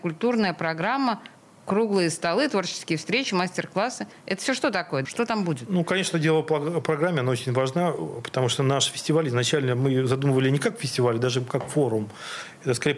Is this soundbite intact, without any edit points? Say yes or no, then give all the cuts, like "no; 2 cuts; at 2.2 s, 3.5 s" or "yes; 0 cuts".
no; 1 cut; at 5.0 s